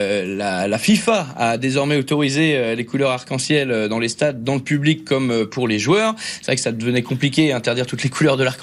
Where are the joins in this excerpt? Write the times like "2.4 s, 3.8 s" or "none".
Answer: none